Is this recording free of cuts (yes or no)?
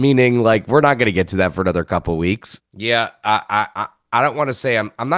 no